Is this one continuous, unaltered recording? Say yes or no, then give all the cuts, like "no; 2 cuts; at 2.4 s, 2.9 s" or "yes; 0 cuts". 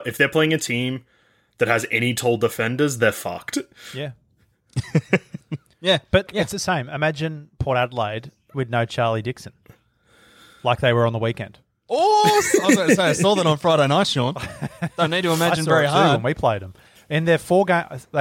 no; 1 cut; at 6.3 s